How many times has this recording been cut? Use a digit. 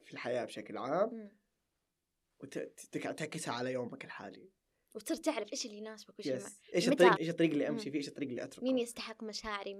1